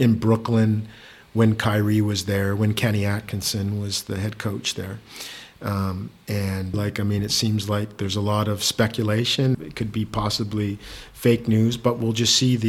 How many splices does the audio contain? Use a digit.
2